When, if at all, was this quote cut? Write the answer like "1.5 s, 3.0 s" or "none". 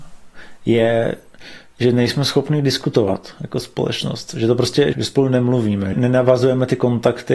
4.9 s, 5.9 s